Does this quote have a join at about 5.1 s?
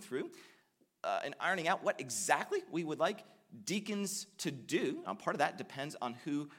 no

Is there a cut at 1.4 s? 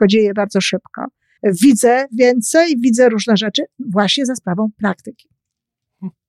yes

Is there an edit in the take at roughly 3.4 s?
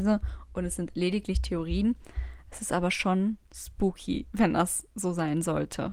yes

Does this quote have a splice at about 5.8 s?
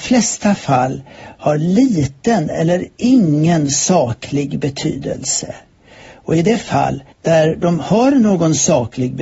no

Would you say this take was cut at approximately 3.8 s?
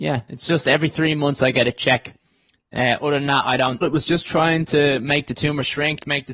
yes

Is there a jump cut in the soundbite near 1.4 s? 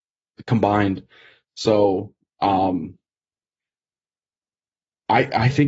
yes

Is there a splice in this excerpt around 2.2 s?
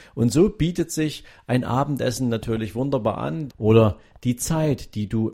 no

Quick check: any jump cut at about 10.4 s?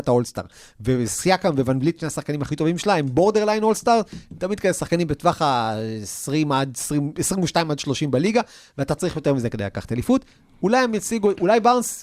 no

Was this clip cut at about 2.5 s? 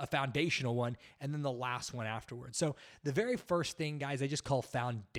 no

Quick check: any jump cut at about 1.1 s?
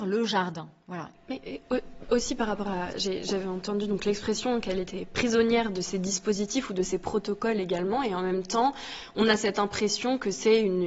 yes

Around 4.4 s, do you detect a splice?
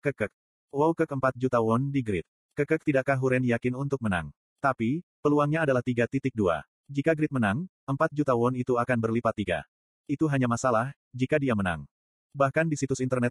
yes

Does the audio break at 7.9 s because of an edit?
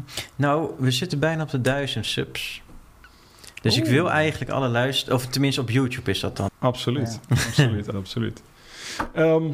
yes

